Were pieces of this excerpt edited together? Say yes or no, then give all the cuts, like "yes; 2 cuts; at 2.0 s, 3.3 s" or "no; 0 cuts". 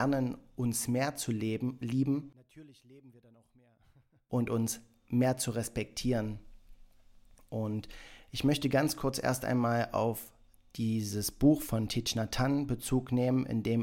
no; 0 cuts